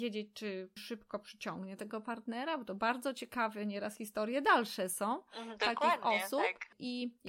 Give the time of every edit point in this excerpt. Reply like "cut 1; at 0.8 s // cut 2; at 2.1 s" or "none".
none